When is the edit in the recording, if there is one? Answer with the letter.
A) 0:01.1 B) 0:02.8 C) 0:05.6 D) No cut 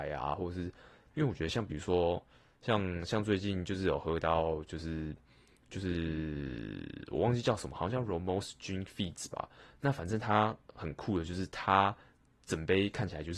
A